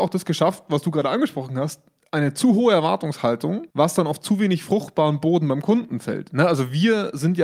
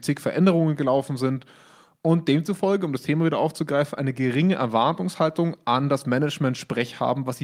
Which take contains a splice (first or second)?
first